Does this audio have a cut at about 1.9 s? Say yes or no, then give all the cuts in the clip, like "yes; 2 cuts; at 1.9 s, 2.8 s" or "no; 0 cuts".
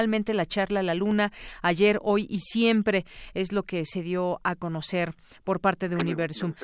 no; 0 cuts